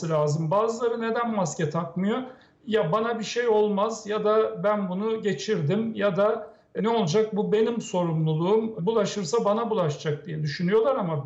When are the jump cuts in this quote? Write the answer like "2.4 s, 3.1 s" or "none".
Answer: 6.8 s, 8.8 s